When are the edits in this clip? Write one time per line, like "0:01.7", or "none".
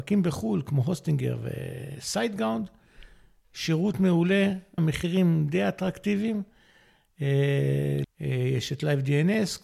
0:04.8
0:08.0

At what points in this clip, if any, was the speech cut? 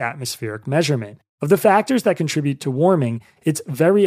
none

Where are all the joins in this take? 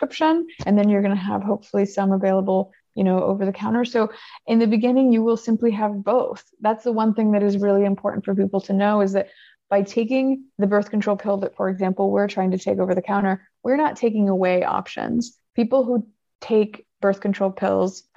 none

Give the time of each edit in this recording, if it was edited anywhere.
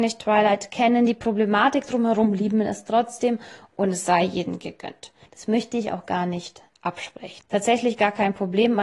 0:05.3
0:07.4

